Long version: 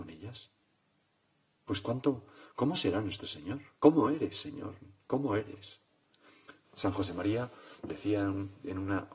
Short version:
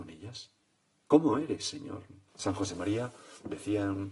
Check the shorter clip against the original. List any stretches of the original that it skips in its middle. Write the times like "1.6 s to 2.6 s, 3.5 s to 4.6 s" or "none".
1.0 s to 3.8 s, 5.0 s to 6.6 s